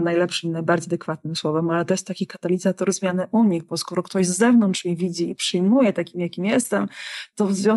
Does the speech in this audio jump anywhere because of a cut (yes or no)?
no